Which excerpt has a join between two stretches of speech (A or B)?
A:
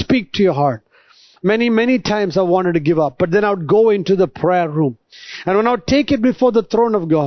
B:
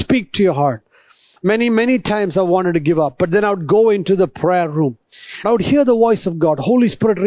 B